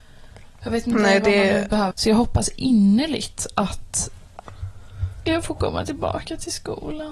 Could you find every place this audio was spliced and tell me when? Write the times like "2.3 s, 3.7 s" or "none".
1.9 s